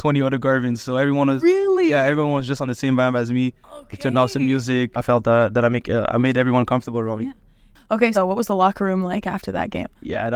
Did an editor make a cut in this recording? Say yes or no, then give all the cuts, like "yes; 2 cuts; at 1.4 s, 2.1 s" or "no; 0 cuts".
yes; 2 cuts; at 4.9 s, 8.1 s